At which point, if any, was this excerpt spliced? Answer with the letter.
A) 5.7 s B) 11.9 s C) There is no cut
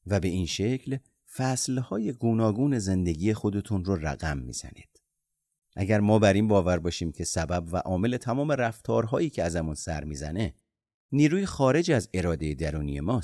A